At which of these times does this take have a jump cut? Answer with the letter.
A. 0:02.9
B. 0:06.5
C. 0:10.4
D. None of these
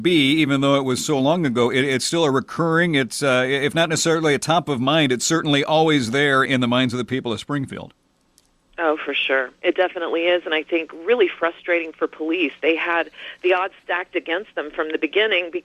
B